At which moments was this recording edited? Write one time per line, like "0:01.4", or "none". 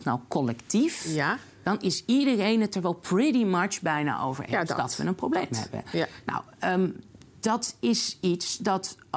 none